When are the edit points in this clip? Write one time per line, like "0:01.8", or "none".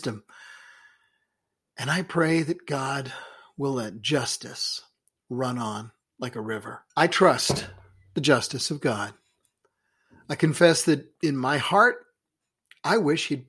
0:06.9